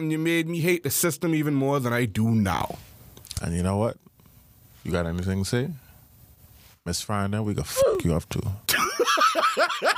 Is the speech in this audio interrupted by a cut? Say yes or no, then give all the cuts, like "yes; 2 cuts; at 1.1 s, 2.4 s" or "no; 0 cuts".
no; 0 cuts